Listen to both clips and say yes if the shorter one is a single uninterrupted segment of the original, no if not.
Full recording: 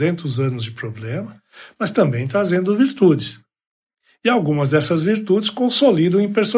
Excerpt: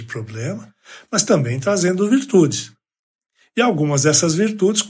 yes